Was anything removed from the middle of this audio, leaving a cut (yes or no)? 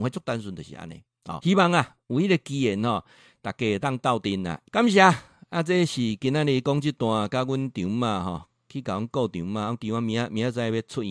yes